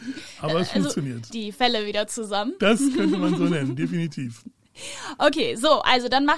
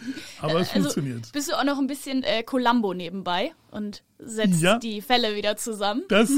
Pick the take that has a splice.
first; 1 cut; at 1.3 s

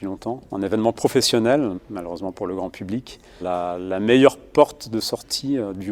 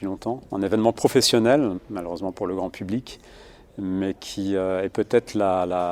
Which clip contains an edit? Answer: first; 1 cut; at 3.4 s

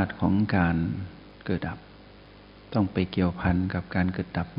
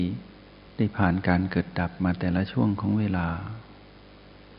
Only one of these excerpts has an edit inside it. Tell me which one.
first; 1 cut; at 1.6 s

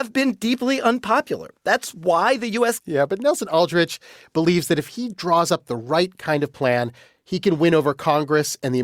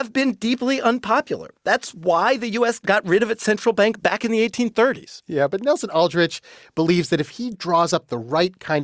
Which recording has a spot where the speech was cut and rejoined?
first; 1 cut; at 2.8 s

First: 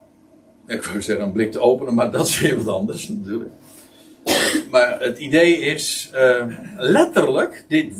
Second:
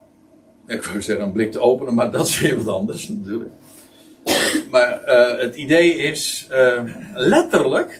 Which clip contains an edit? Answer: first; 1 cut; at 5.0 s

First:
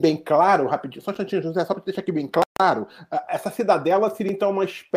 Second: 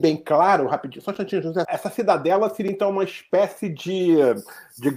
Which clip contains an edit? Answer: second; 1 cut; at 1.7 s

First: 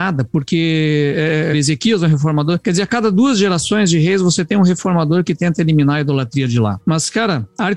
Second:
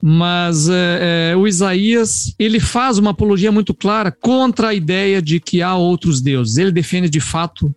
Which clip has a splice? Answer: first; 2 cuts; at 1.5 s, 6.8 s

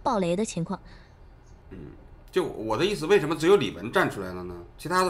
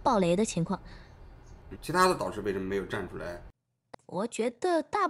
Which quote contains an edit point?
second; 2 cuts; at 1.8 s, 3.9 s

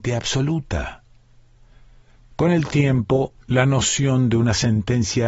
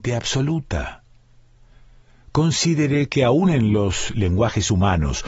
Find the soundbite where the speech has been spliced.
first; 2 cuts; at 2.1 s, 3.4 s

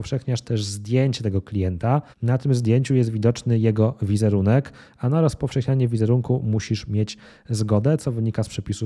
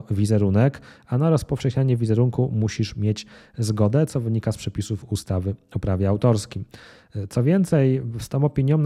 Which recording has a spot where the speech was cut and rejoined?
first; 1 cut; at 2.1 s

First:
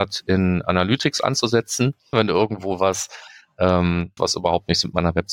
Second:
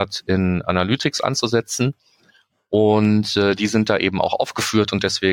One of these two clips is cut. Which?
first; 2 cuts; at 2.1 s, 4.2 s

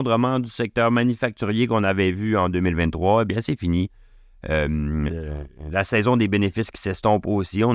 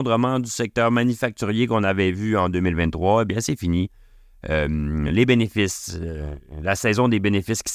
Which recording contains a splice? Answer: first; 1 cut; at 5.1 s

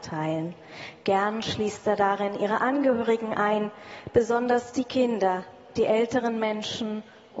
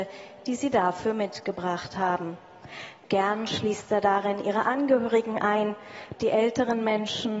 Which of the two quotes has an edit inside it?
second; 2 cuts; at 3.0 s, 6.2 s

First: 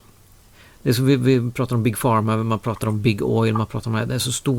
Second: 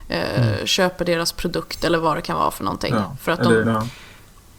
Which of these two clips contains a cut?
second; 1 cut; at 3.6 s

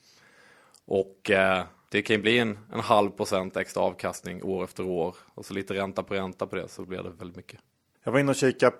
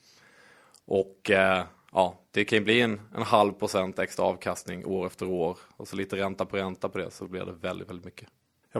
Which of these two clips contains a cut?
first; 2 cuts; at 1.9 s, 7.2 s

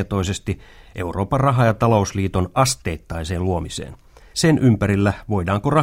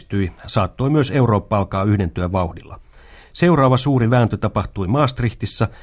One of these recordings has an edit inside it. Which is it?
first; 1 cut; at 4.3 s

